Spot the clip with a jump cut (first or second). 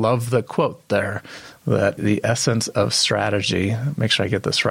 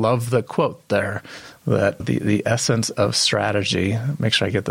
first